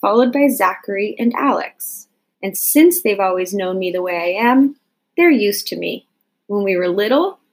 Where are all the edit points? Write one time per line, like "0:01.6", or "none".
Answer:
0:02.3